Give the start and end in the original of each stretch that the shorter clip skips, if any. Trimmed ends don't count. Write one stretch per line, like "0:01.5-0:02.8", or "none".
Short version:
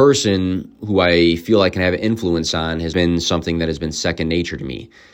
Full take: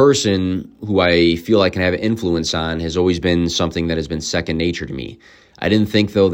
0:02.9-0:03.2